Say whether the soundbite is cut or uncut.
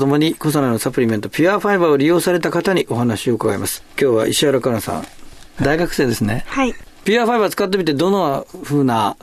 uncut